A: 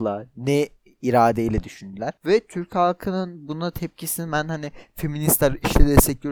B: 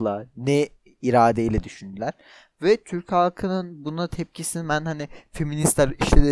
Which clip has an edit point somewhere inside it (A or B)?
A